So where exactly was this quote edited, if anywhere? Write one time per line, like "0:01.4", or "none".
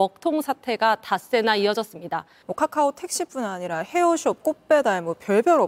0:02.4